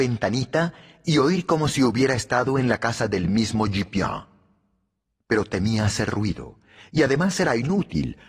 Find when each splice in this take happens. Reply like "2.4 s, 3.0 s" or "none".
none

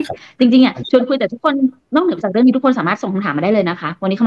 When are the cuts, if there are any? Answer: none

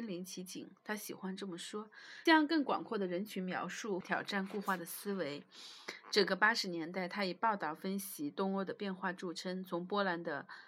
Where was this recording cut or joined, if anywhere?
2.3 s, 4.0 s

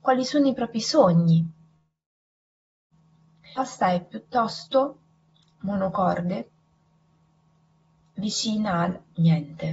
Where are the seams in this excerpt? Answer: none

